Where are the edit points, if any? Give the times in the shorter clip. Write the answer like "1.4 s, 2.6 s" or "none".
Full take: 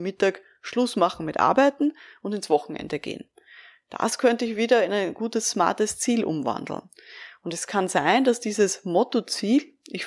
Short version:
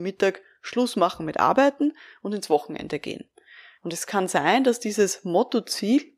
3.8 s